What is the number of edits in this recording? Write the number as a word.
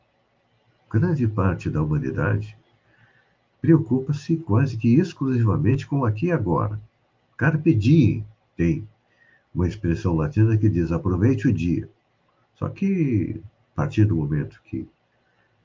one